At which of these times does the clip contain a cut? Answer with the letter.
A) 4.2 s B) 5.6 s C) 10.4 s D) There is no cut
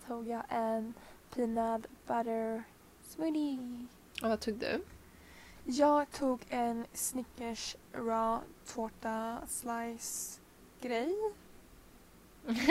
A